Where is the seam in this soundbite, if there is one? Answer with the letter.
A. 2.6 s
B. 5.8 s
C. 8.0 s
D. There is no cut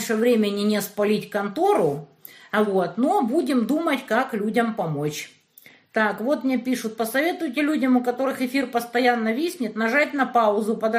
D